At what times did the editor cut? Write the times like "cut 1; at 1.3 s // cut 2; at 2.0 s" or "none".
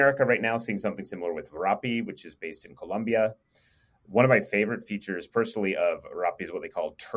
none